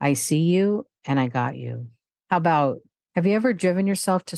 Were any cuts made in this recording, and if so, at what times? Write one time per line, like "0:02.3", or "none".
0:02.1